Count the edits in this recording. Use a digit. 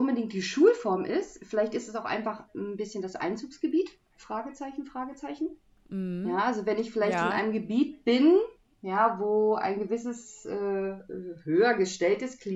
0